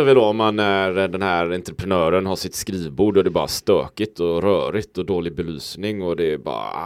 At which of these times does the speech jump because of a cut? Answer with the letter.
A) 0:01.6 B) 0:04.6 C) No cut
C